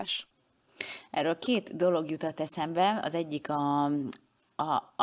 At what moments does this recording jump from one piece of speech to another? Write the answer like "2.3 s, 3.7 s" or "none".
none